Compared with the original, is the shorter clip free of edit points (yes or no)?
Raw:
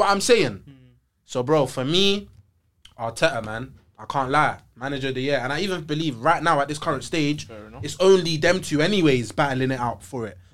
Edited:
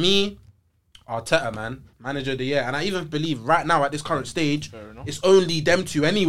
no